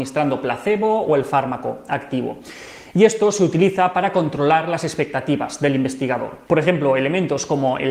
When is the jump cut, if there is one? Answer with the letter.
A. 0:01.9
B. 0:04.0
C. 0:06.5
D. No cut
C